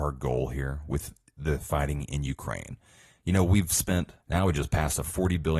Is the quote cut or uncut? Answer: cut